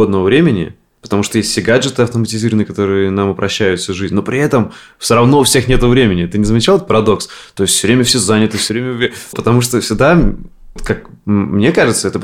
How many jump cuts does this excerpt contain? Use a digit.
2